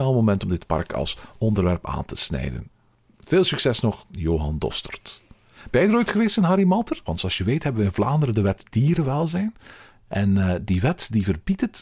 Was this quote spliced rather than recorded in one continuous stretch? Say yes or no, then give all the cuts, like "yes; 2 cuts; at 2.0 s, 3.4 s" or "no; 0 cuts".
yes; 2 cuts; at 7.1 s, 10.1 s